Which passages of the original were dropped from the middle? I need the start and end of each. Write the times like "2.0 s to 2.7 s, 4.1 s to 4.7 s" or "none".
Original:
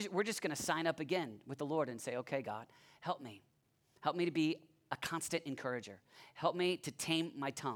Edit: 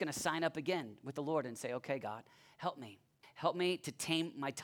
3.7 s to 6.2 s